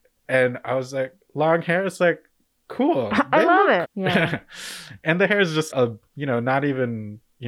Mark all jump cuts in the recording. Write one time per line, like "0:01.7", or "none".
0:03.8
0:05.7